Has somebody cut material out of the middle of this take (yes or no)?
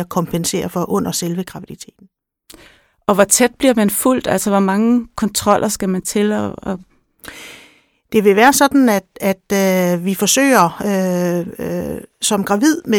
no